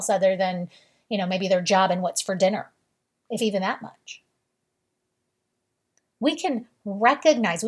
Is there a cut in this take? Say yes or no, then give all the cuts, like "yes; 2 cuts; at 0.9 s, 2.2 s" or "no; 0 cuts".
no; 0 cuts